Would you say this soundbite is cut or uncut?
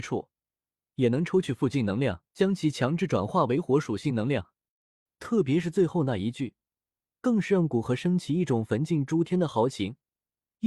cut